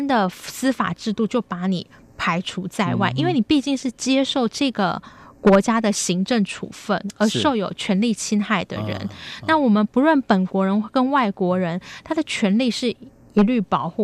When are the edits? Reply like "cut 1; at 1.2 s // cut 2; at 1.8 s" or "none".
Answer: none